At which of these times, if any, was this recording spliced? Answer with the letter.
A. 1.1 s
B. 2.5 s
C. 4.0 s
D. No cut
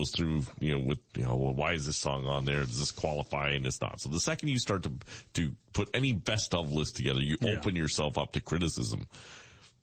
A